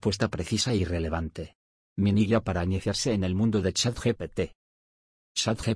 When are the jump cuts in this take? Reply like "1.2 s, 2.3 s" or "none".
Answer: 1.8 s